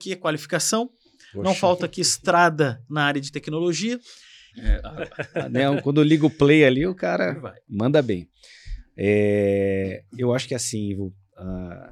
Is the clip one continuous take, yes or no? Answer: no